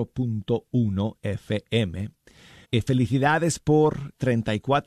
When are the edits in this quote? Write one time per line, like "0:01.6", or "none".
0:02.6

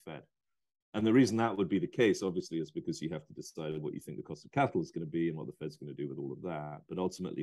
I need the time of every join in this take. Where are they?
none

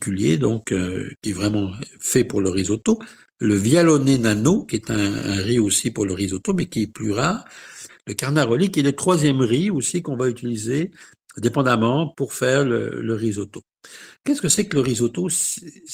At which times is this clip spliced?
0:07.9

